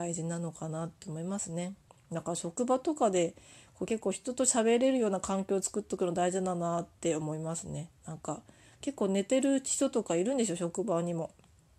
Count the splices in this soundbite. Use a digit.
0